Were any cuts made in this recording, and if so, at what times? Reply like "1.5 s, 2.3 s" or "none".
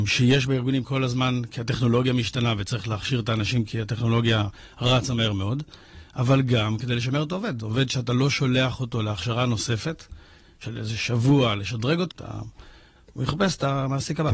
12.1 s

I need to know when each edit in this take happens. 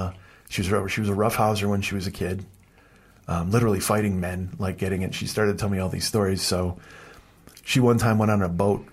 5.1 s

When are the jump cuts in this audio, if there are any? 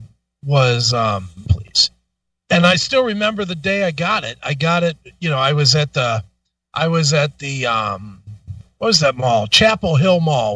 1.5 s

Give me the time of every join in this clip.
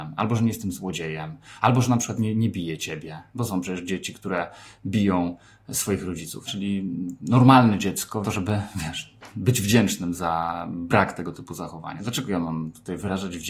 6.5 s, 8.2 s, 12.0 s

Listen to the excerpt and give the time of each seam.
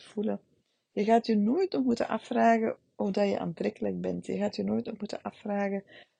none

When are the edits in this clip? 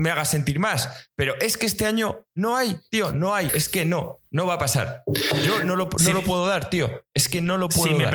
3.5 s

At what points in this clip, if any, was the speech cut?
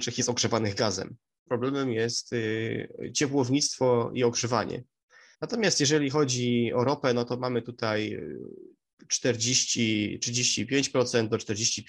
1.5 s, 5.3 s

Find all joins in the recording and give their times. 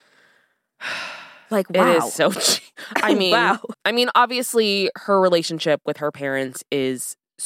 3.7 s

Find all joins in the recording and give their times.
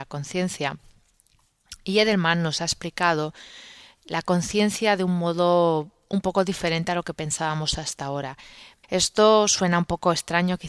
8.8 s

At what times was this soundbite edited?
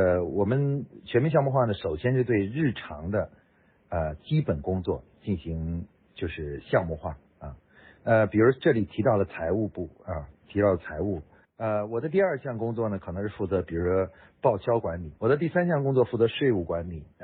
11.4 s, 15.2 s

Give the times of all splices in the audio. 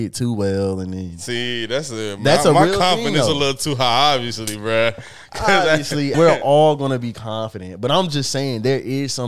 6.1 s

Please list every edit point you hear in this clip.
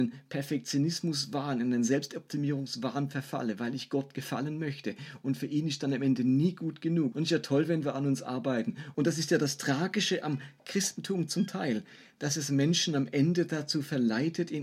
7.1 s, 8.9 s

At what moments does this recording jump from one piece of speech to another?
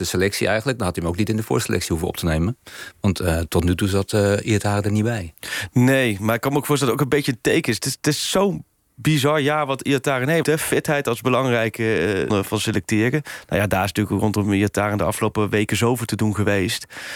10.4 s, 12.3 s

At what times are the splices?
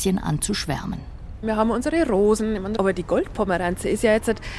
2.8 s

